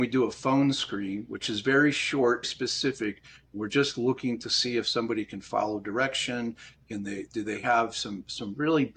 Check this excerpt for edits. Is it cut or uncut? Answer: cut